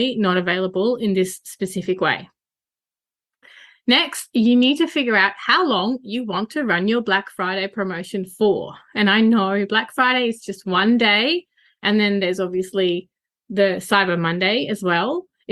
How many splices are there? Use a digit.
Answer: 0